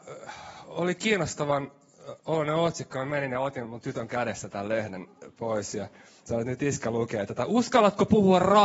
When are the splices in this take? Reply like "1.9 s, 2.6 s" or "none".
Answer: none